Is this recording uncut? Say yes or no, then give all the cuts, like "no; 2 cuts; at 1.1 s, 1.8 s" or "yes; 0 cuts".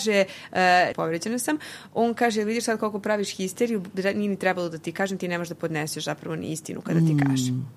no; 1 cut; at 0.9 s